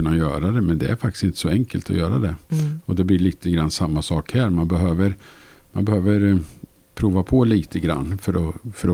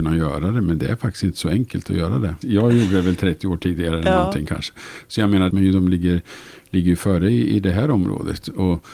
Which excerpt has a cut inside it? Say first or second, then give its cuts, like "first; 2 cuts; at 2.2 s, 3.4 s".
second; 2 cuts; at 2.4 s, 5.5 s